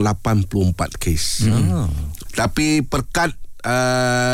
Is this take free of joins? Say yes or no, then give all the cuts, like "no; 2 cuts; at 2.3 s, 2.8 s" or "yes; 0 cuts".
no; 1 cut; at 2.3 s